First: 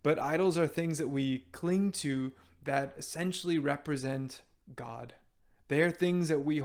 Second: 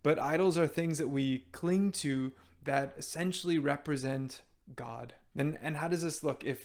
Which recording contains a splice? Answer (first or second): second